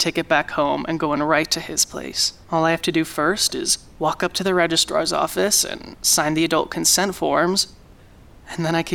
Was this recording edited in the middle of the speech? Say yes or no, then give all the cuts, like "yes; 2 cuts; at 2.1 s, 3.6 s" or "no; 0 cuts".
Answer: yes; 1 cut; at 2.4 s